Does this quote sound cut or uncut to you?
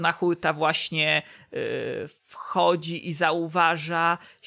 cut